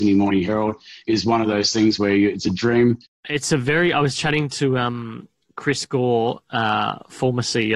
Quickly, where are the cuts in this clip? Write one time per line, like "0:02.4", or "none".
0:03.1